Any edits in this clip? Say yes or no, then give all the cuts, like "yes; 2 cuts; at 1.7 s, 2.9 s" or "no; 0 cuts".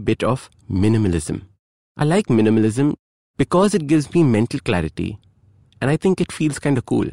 no; 0 cuts